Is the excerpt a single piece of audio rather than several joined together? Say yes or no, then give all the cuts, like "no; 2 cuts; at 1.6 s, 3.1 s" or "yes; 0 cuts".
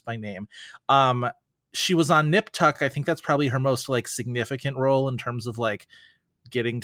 yes; 0 cuts